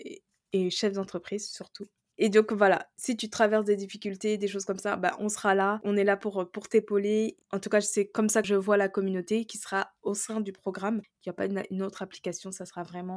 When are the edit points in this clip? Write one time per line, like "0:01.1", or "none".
none

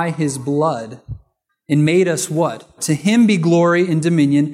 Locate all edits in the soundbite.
0:02.8

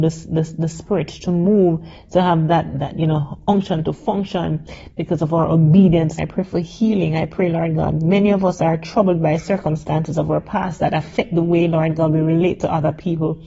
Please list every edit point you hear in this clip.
0:06.2

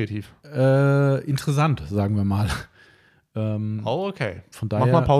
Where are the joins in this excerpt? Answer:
none

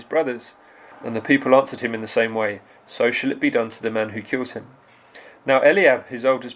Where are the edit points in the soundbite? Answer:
0:00.9

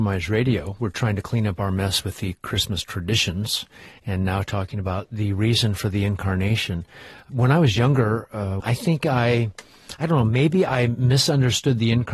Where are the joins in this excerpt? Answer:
0:07.3
0:08.6

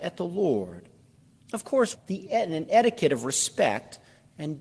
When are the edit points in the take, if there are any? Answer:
0:01.9

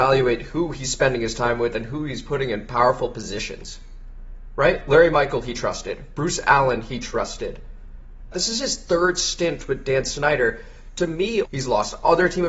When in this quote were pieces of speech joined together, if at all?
0:08.3
0:11.4

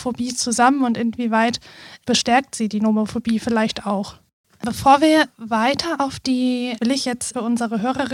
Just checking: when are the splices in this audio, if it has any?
0:04.4
0:06.8

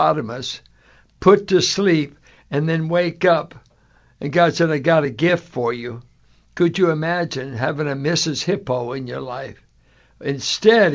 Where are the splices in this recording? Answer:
none

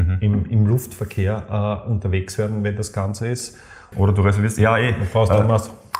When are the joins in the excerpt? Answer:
0:03.9

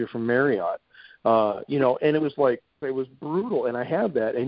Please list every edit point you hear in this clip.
0:02.8

